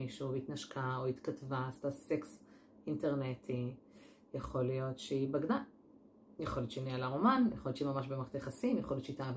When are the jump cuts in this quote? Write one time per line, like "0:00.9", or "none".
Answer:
none